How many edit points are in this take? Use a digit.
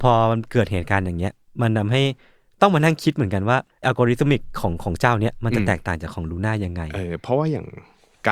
1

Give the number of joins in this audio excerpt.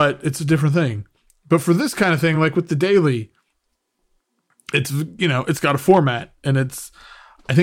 0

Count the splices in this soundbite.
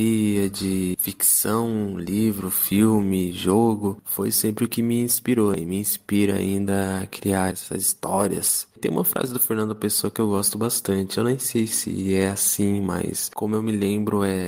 0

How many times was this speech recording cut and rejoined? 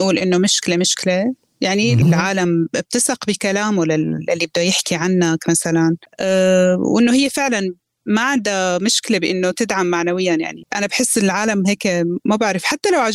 1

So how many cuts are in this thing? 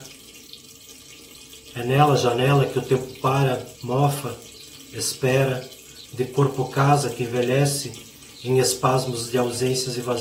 2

